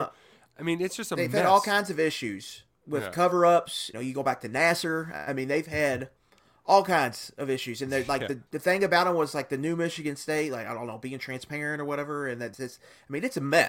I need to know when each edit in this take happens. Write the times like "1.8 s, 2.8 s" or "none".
3.9 s, 8.5 s, 12.5 s